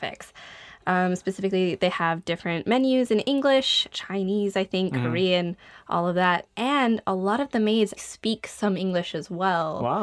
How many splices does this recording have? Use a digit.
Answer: 2